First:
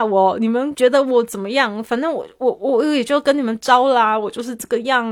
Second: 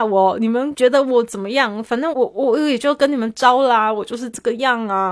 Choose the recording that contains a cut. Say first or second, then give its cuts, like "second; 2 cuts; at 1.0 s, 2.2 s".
second; 1 cut; at 2.1 s